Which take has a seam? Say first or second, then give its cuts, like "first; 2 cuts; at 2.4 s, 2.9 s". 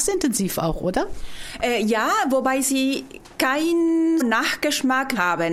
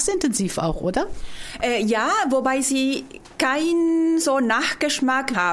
first; 1 cut; at 4.2 s